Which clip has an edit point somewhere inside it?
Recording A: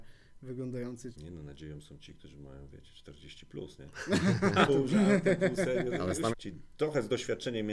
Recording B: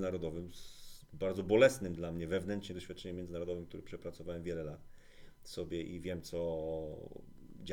A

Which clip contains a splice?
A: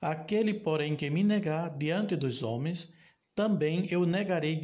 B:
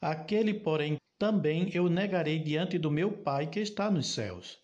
B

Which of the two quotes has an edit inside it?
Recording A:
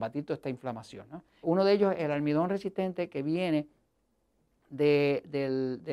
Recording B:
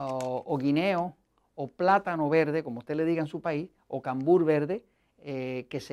A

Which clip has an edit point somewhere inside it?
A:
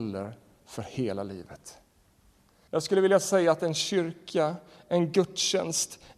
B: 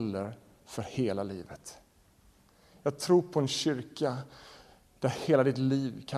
A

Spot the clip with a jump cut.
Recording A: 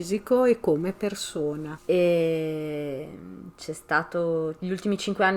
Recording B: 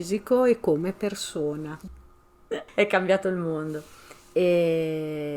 A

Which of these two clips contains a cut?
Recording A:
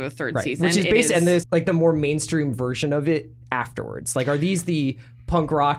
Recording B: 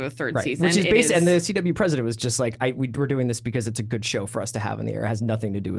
A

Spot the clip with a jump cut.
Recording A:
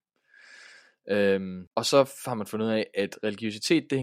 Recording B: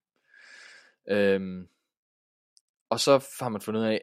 A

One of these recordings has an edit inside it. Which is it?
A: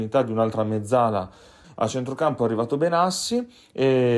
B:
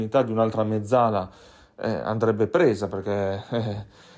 A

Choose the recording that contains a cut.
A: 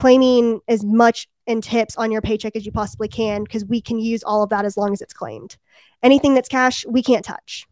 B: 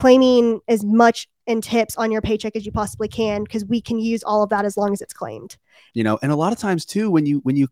B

